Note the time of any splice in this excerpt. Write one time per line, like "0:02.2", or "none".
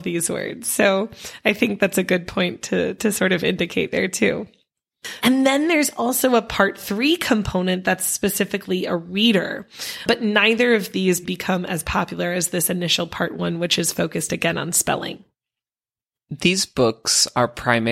0:05.2
0:11.2